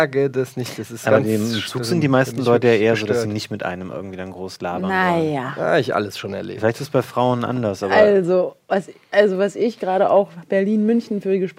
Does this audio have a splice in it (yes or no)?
no